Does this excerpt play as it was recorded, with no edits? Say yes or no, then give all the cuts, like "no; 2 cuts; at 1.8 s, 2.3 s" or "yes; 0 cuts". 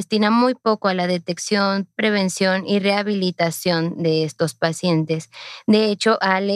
yes; 0 cuts